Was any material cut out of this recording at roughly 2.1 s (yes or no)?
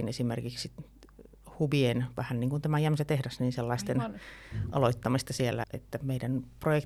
no